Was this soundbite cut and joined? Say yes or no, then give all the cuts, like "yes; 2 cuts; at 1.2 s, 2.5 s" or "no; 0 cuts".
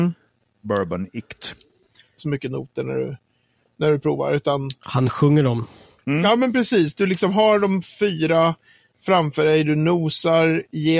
yes; 1 cut; at 2.2 s